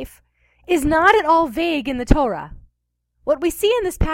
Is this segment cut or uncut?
cut